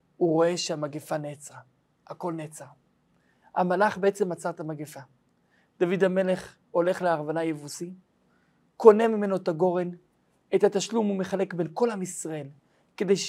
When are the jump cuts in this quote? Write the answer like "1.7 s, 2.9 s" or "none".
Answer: none